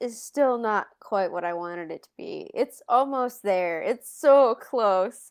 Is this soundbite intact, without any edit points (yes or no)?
yes